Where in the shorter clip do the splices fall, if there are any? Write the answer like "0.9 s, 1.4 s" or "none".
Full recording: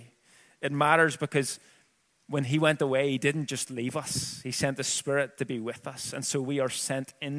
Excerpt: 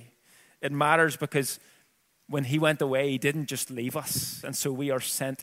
4.4 s